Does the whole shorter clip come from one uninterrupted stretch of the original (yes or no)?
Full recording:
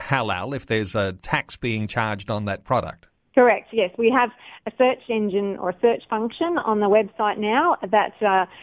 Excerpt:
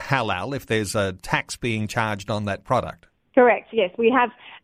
yes